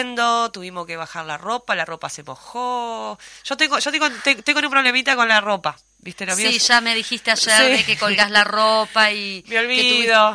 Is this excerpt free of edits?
yes; 0 cuts

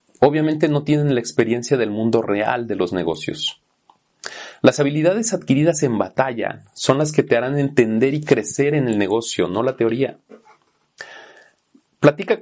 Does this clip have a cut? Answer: no; 0 cuts

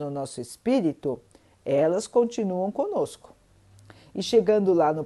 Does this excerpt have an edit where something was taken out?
no; 0 cuts

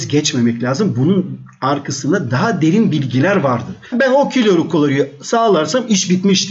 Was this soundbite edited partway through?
yes; 1 cut; at 3.9 s

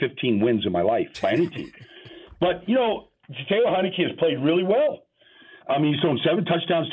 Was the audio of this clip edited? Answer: no; 0 cuts

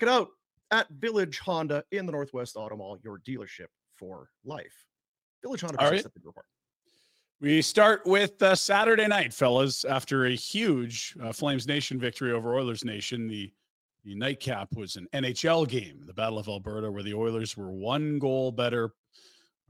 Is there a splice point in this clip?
no; 0 cuts

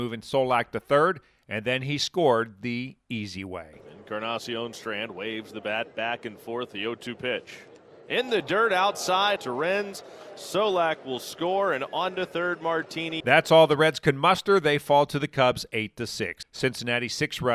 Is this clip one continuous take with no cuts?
no; 3 cuts; at 9.4 s, 13.2 s, 16.4 s

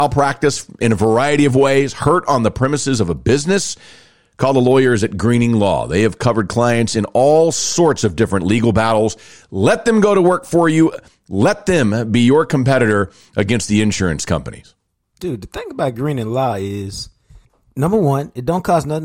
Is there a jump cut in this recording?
no; 0 cuts

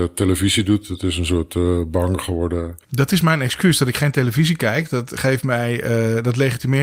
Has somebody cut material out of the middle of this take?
no; 0 cuts

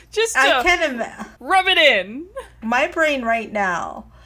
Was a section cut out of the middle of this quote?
yes; 2 cuts; at 1.4 s, 2.6 s

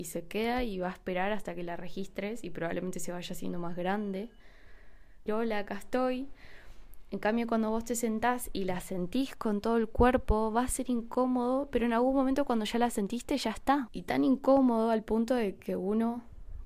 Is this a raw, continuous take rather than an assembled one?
no; 2 cuts; at 5.3 s, 13.9 s

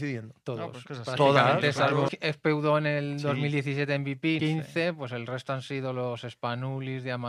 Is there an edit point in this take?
yes; 2 cuts; at 2.1 s, 4.4 s

